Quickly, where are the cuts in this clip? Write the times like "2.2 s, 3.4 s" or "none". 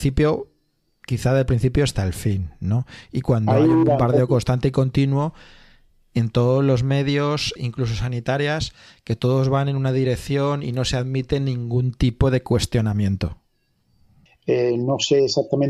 7.6 s, 14.3 s